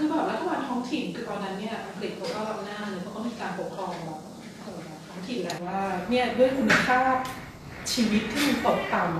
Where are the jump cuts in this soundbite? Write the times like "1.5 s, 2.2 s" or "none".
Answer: 5.6 s